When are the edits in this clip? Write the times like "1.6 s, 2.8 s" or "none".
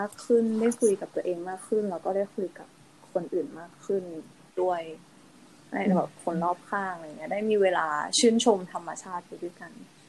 none